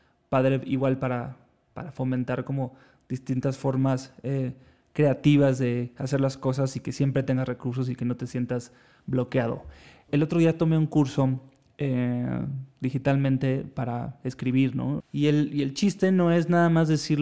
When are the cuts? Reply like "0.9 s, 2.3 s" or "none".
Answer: 10.1 s, 15.0 s